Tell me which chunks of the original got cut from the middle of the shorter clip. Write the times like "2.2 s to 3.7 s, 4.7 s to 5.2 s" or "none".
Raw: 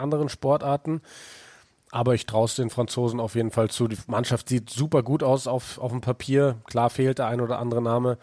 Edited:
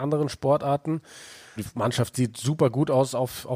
1.6 s to 3.9 s

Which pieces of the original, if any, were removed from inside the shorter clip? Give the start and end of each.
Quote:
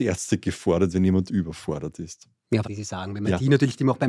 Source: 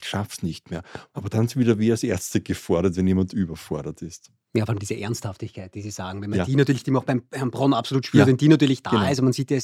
4.7 s to 5.7 s

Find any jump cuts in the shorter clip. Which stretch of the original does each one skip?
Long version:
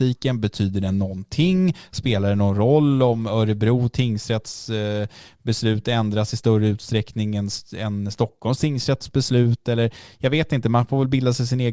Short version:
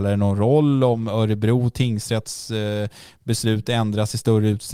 none

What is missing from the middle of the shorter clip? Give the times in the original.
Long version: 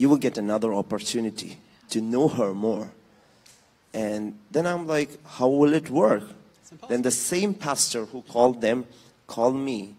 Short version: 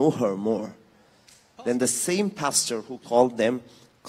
3.7 s to 6.8 s

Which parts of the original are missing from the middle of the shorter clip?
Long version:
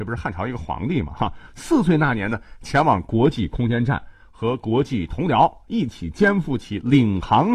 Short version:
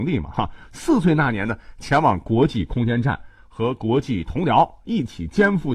none

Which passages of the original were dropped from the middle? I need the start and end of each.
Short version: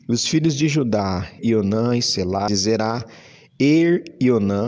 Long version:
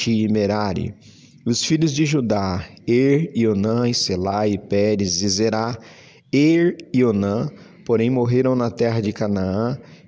2.8 s to 3.3 s, 4.4 s to 5.2 s

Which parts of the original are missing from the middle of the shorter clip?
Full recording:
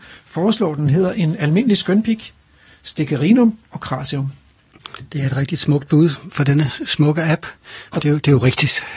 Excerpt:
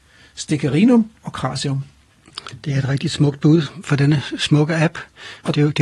none

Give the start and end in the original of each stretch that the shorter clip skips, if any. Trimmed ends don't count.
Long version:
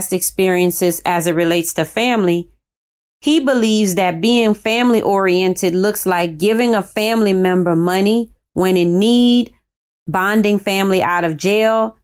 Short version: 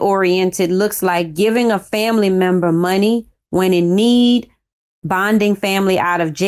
none

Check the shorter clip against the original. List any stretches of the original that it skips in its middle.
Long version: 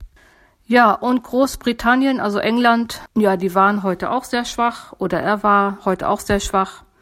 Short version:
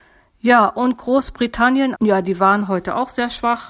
2.2 s to 3.1 s

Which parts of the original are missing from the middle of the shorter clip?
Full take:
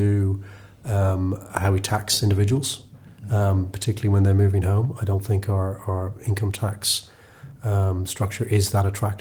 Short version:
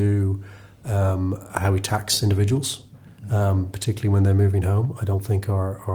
none

